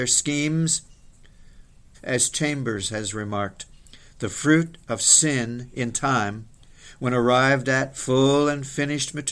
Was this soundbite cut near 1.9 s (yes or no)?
yes